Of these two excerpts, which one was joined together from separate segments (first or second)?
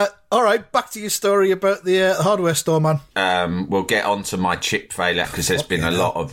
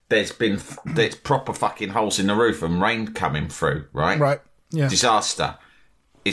first